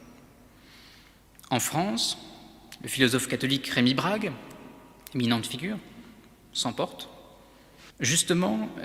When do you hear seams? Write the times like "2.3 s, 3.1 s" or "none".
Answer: 7.9 s